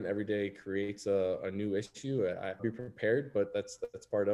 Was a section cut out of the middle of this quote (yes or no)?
yes